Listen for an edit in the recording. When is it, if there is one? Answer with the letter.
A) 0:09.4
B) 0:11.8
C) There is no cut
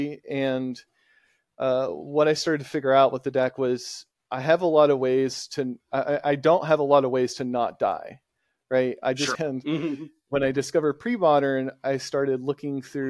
A